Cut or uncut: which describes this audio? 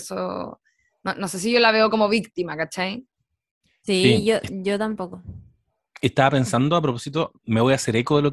uncut